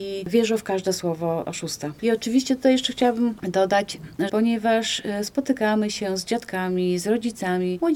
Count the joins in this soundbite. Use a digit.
1